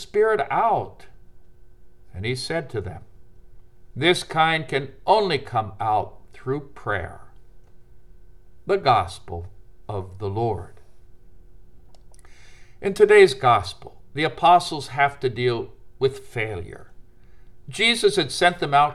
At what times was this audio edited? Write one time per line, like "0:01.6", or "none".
none

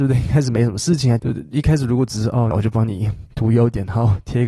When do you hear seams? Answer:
0:01.2
0:02.5

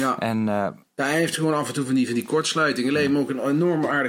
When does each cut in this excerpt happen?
none

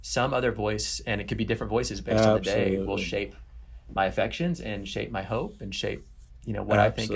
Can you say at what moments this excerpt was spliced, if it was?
none

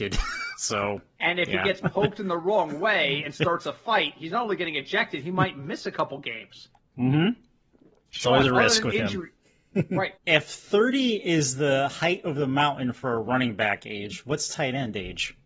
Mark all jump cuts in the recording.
0:10.2

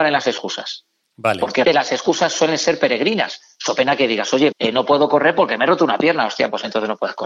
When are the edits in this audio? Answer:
0:01.6
0:04.5

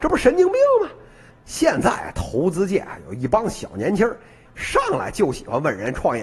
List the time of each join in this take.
0:01.3
0:04.5

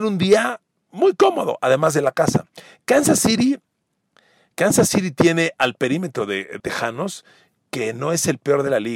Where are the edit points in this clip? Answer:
0:06.6

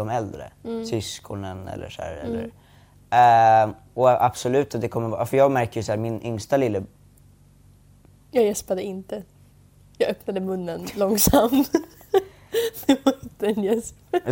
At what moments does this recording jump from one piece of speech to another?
none

